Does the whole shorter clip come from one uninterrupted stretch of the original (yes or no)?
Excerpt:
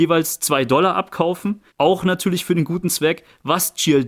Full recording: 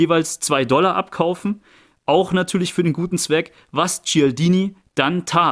no